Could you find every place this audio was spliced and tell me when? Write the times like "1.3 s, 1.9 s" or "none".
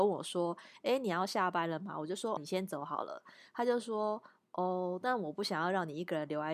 2.4 s